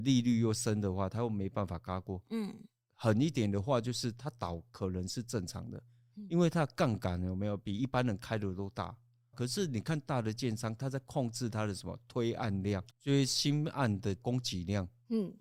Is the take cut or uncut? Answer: cut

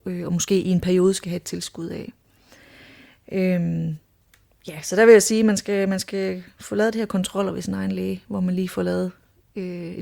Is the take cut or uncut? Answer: uncut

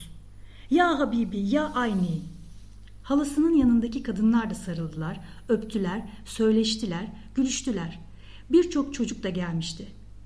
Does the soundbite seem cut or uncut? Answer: uncut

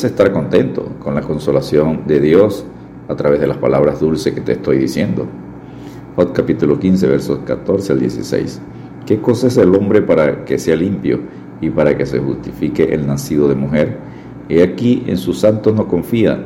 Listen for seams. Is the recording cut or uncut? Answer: cut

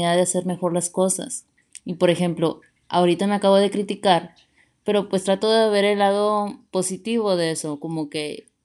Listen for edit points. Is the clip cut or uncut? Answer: uncut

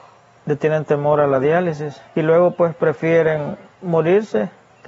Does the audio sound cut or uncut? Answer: uncut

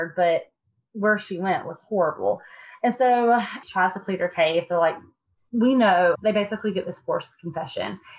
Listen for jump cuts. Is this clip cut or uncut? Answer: cut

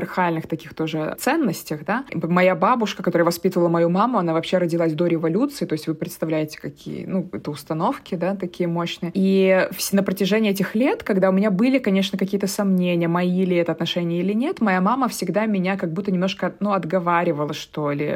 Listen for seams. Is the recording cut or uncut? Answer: uncut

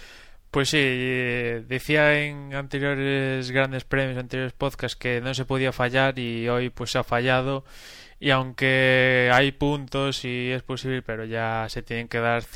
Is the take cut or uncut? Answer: uncut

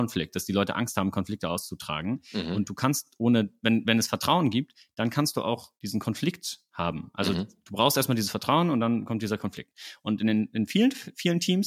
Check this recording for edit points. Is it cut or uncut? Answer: cut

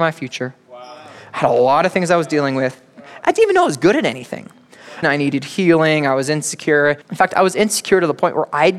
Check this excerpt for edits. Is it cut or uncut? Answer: cut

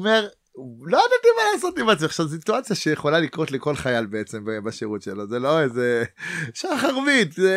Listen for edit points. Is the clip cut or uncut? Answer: uncut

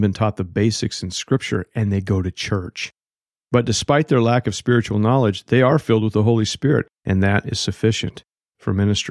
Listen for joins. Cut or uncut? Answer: uncut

